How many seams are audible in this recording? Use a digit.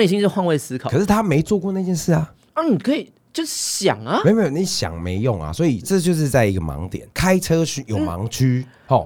2